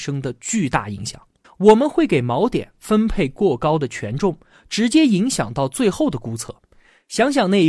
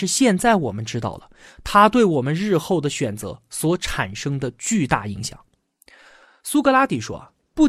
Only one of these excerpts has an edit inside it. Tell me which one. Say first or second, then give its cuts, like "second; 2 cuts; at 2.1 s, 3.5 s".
first; 1 cut; at 1.4 s